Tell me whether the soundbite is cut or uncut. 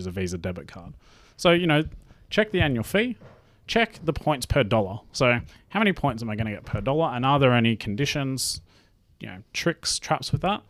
uncut